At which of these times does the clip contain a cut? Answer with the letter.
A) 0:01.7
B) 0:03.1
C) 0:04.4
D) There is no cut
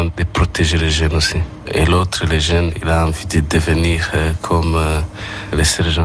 A